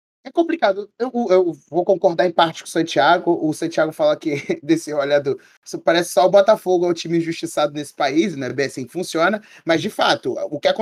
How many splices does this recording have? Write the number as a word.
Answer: zero